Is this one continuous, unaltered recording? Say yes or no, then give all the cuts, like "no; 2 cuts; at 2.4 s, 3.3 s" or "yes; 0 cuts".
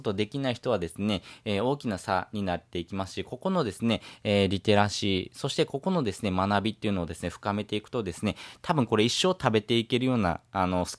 yes; 0 cuts